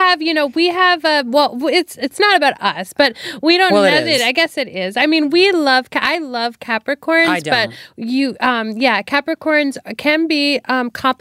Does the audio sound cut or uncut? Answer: uncut